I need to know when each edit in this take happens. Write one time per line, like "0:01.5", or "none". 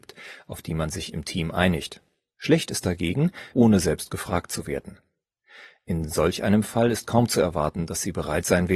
0:03.5

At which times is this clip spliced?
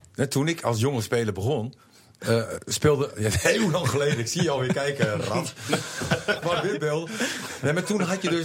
0:06.4

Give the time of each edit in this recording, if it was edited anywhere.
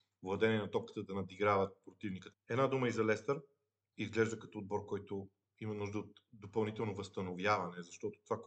0:02.3
0:03.9

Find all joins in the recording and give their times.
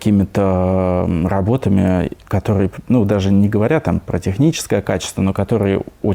none

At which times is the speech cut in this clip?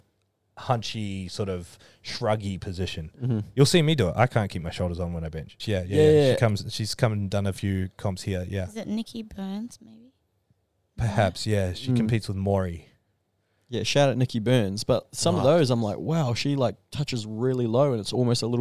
0:05.6

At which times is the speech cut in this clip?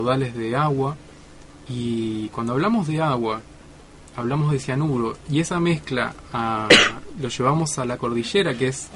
none

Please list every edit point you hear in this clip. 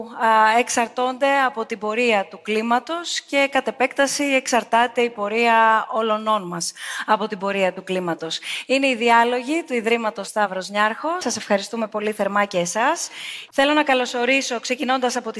0:11.2
0:13.5

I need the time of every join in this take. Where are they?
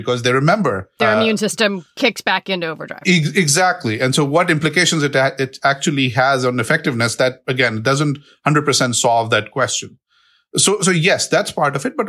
none

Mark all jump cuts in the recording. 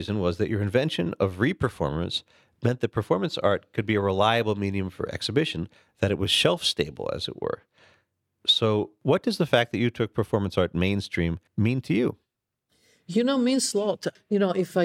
0:11.5

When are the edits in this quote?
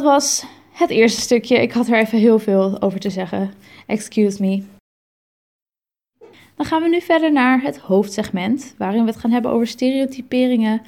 none

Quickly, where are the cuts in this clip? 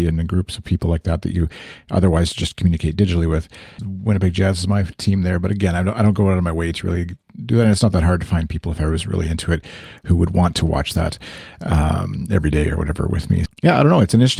0:03.8
0:13.5

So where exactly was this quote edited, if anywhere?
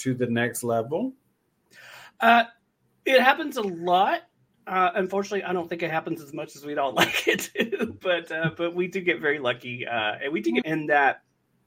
0:10.6

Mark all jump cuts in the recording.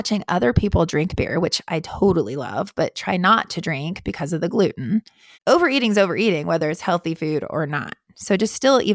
0:05.3

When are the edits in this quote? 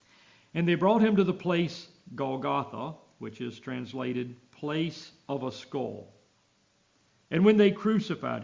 0:07.2

